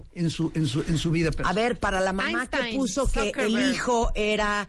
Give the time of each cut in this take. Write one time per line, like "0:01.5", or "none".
none